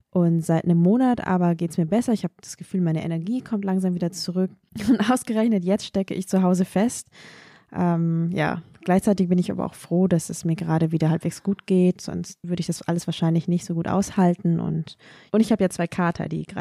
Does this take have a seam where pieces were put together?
yes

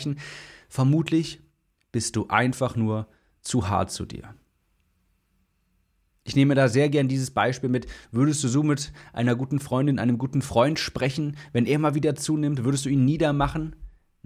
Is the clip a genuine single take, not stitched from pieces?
yes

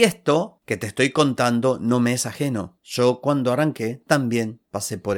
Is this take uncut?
yes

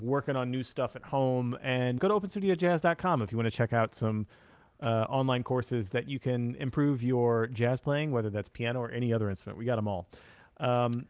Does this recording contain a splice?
yes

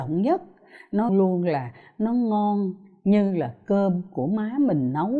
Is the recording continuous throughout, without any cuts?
no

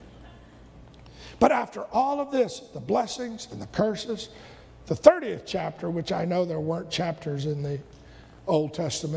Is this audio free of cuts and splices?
yes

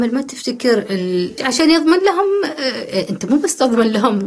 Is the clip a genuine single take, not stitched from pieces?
no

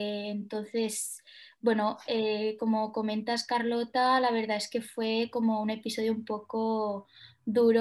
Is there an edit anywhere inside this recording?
no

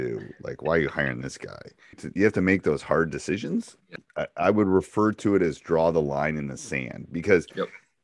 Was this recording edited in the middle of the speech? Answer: yes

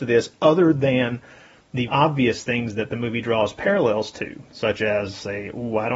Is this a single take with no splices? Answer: no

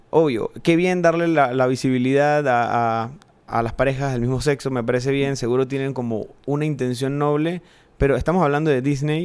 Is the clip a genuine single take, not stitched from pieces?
yes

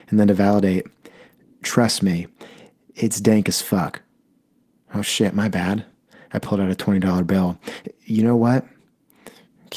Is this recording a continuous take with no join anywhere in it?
yes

